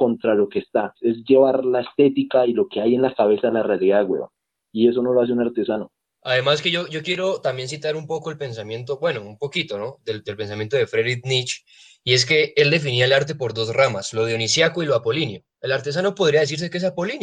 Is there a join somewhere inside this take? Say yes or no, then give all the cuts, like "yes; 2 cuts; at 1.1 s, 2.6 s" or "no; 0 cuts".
yes; 1 cut; at 1.0 s